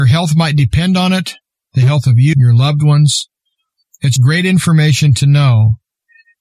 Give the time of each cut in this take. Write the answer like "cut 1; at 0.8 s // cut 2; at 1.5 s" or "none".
cut 1; at 2.3 s // cut 2; at 4.2 s